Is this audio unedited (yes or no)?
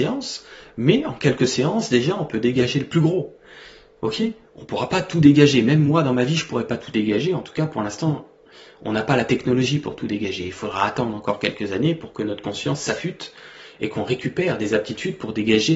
yes